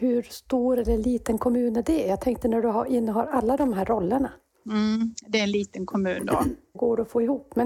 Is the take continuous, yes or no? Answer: no